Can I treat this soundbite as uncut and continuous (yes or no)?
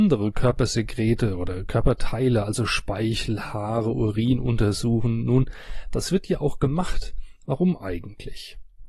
no